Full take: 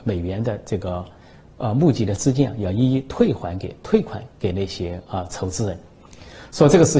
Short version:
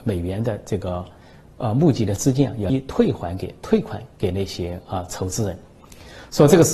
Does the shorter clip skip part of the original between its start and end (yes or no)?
yes